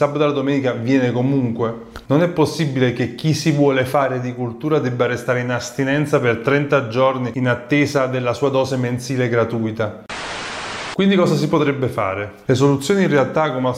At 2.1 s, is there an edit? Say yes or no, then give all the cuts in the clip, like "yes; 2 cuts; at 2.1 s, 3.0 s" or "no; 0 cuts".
yes; 1 cut; at 2.1 s